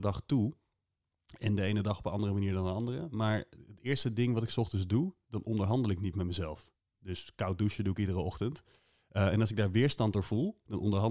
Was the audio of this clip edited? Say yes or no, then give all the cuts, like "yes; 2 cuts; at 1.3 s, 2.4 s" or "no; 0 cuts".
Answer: no; 0 cuts